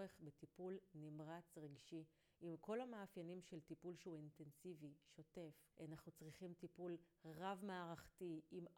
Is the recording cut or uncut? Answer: cut